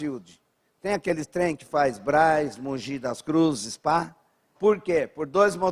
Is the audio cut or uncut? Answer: cut